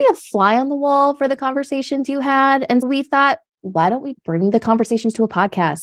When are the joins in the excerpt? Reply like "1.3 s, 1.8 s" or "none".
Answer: 2.8 s, 4.1 s